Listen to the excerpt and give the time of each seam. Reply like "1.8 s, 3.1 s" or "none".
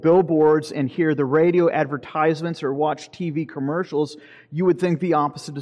none